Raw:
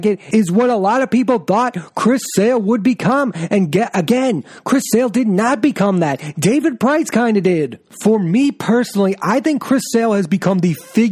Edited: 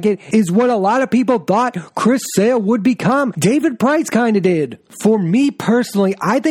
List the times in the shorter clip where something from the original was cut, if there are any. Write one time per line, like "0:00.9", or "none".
0:03.3